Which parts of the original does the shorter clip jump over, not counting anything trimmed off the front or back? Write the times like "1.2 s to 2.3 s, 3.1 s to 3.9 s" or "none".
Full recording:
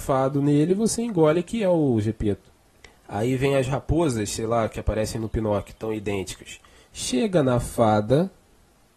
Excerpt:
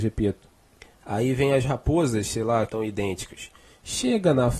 4.7 s to 5.8 s